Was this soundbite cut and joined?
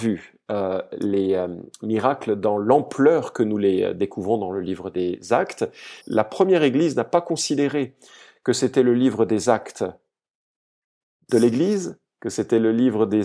yes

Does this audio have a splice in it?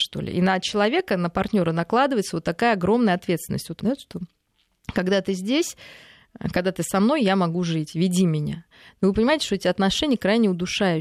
yes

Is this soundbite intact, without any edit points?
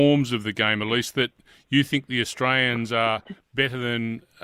yes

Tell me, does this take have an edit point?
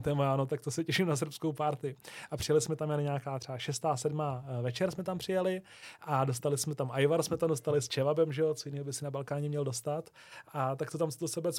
no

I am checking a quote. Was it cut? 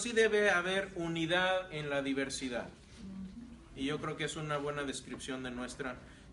no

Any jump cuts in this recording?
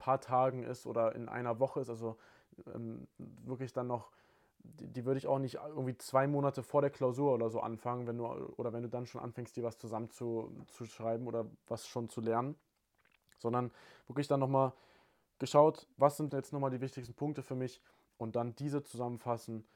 yes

